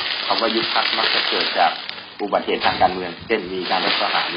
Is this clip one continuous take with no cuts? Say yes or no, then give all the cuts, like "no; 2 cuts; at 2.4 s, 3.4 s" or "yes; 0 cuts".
yes; 0 cuts